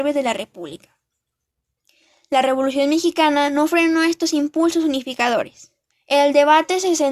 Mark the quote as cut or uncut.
cut